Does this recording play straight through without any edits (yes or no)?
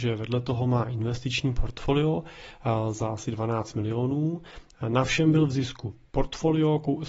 yes